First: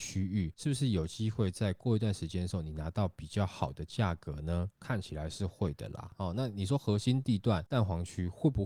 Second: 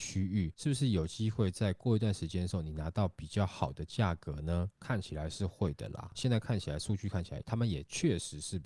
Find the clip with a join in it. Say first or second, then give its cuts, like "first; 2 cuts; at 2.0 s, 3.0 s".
second; 1 cut; at 6.1 s